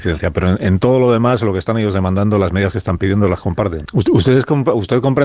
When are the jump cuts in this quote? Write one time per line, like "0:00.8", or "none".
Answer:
0:03.8